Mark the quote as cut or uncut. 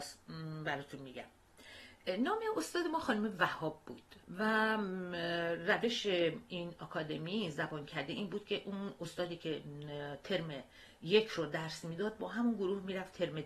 cut